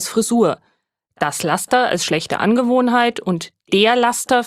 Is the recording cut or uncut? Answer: uncut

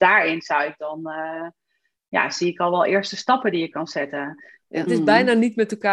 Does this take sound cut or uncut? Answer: cut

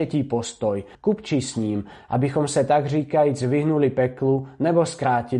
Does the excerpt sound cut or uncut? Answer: cut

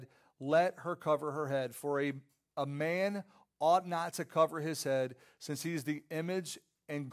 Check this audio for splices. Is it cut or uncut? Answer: uncut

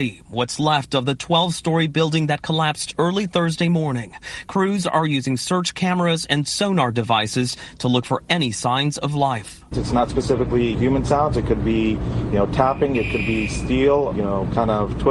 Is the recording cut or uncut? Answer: cut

